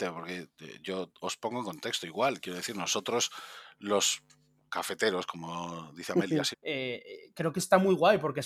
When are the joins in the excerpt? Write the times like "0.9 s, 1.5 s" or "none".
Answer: 6.5 s